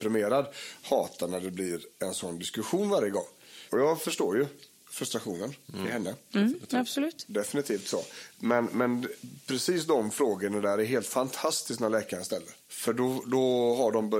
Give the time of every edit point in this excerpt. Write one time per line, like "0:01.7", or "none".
0:12.6